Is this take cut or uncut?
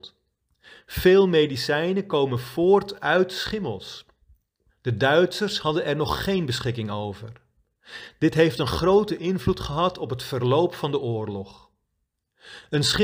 cut